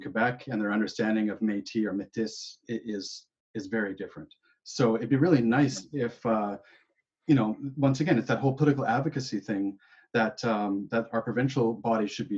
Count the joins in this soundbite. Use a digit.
0